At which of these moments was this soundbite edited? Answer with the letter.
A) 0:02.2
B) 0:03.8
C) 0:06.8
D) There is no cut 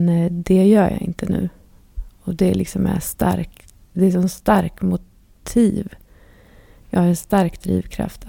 B